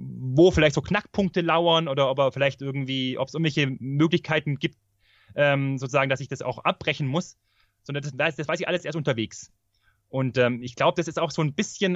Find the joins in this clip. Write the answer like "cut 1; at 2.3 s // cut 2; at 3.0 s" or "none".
none